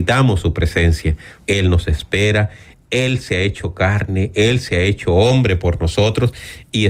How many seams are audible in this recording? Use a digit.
1